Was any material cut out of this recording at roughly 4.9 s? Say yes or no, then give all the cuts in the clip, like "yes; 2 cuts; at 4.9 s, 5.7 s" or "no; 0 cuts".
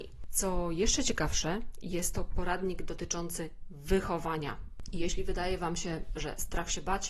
no; 0 cuts